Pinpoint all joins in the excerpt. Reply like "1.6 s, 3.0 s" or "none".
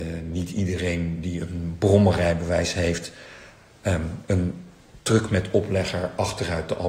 none